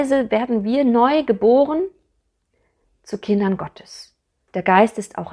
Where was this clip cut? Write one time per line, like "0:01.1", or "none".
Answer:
0:04.4